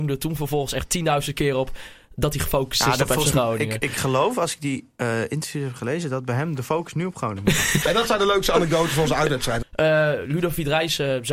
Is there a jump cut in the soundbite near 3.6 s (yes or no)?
no